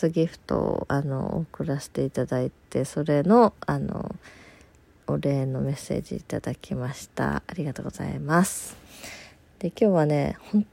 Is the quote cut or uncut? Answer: uncut